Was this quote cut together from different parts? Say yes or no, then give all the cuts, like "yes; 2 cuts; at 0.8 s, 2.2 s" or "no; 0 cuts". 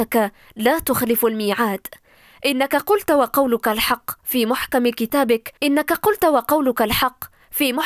yes; 1 cut; at 5.6 s